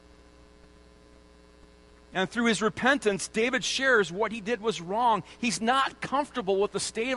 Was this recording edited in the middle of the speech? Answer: no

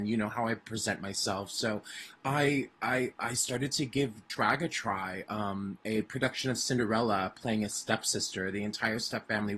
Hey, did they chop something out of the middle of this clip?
yes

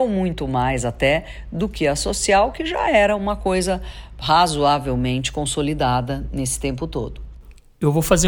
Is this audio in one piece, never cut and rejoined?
yes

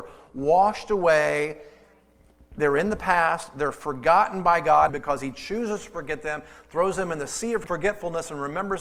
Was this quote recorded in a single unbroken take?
no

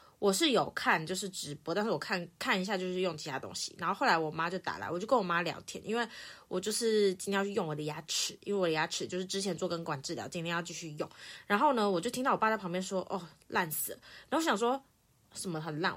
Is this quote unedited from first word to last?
yes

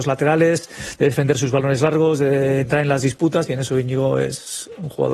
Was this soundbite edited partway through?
no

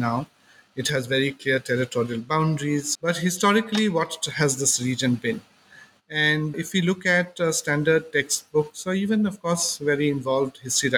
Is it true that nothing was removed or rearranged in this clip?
no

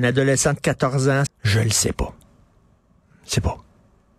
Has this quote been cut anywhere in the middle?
yes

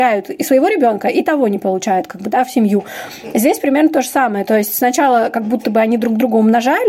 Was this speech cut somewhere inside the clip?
no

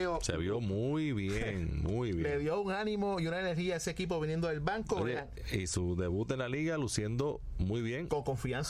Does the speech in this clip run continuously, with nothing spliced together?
yes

